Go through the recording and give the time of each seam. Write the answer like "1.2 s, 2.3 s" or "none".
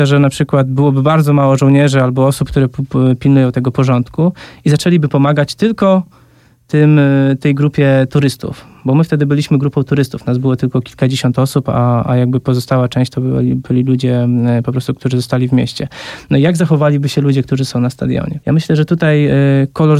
none